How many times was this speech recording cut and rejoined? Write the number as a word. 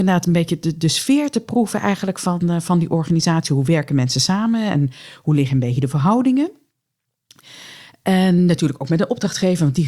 zero